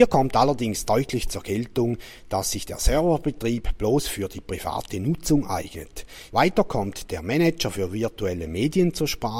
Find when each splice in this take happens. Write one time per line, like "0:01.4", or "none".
0:06.3